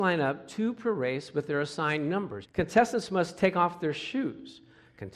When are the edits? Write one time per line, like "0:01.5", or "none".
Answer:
0:02.4